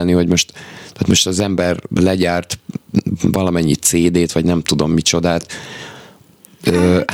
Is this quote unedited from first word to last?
yes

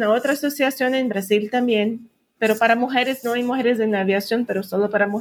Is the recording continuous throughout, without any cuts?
yes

